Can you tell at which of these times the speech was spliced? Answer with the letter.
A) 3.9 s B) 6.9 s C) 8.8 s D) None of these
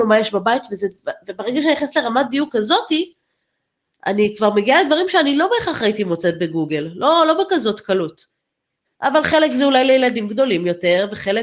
C